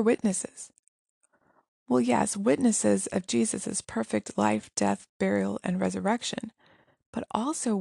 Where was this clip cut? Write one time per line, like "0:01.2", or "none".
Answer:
none